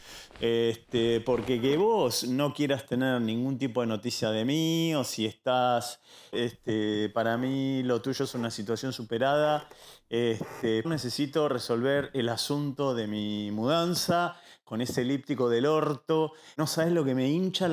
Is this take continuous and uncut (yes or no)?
no